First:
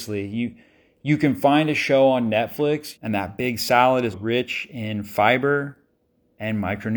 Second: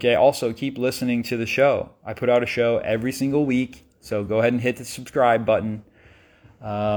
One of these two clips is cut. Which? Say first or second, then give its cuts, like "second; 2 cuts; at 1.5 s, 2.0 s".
first; 2 cuts; at 3.0 s, 4.1 s